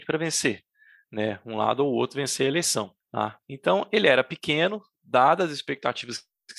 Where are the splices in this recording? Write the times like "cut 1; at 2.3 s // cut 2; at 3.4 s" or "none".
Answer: cut 1; at 3.0 s